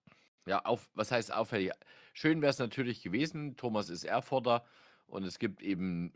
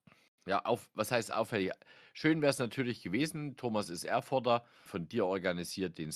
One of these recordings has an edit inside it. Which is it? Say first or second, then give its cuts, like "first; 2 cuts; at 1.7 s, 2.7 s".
second; 1 cut; at 4.9 s